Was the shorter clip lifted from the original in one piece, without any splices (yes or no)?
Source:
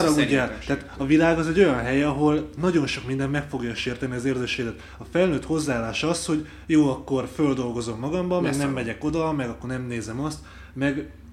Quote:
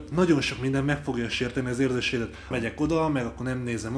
no